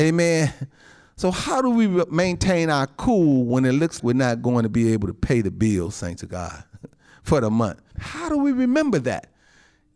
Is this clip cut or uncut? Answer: cut